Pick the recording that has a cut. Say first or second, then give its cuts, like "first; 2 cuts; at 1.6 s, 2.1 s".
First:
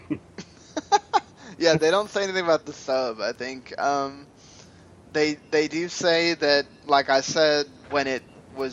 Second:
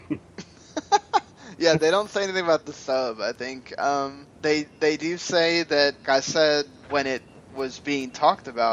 second; 2 cuts; at 4.3 s, 6.0 s